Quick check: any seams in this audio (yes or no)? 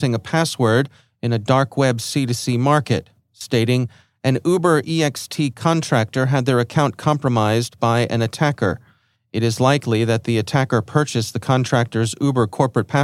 no